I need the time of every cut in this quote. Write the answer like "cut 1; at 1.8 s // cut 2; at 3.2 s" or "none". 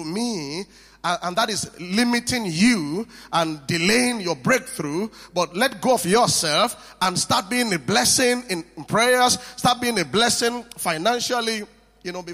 none